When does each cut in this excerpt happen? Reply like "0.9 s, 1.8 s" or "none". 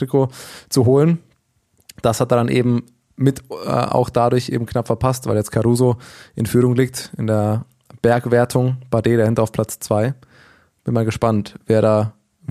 none